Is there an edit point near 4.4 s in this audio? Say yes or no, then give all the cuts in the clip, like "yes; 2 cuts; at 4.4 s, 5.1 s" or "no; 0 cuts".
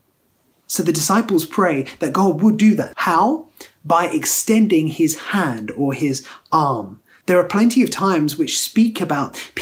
no; 2 cuts; at 2.9 s, 7.2 s